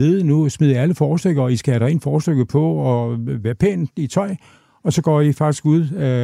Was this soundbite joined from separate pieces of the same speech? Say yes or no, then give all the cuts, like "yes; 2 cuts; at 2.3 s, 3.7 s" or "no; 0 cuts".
no; 0 cuts